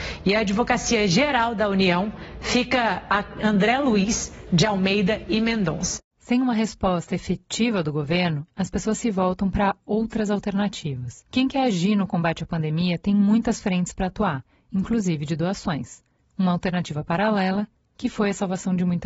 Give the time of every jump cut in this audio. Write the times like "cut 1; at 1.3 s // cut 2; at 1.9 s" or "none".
cut 1; at 11.3 s